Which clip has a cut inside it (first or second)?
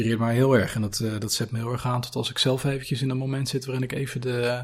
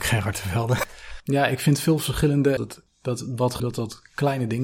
second